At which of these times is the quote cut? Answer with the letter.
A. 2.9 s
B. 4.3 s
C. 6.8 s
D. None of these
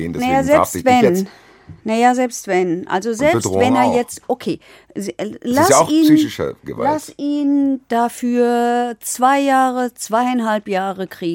A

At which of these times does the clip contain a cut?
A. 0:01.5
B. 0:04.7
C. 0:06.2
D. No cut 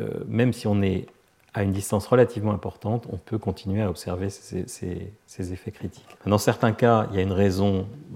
C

